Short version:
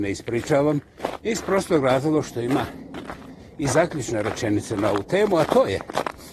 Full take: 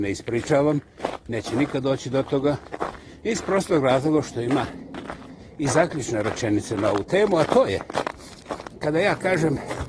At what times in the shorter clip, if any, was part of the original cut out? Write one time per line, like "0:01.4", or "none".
0:01.2